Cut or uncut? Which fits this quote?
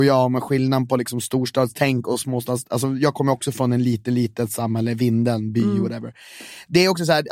uncut